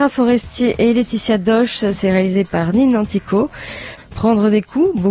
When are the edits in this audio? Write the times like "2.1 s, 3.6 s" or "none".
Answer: 4.0 s